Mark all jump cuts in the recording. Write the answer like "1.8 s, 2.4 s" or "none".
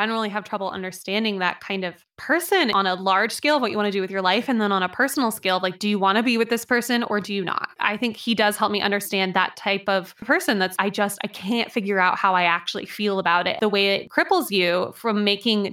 10.8 s